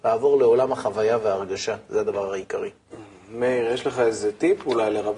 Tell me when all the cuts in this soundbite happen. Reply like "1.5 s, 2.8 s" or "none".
none